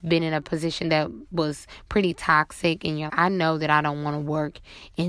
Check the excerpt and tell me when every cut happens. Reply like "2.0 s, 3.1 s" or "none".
3.1 s